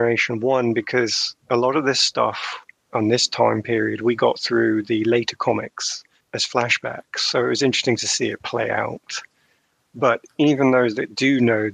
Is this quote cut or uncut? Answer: uncut